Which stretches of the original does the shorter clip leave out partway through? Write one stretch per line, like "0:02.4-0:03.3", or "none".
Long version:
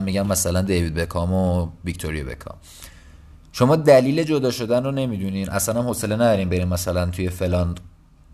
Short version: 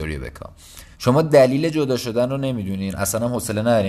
0:03.0-0:03.5

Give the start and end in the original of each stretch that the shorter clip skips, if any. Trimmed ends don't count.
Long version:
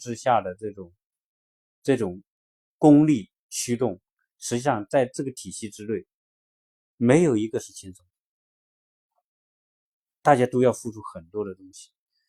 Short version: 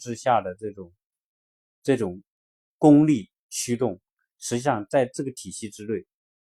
none

